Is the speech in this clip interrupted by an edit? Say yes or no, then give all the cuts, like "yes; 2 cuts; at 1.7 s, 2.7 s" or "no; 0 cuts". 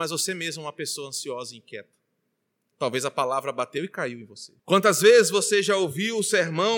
yes; 1 cut; at 4.6 s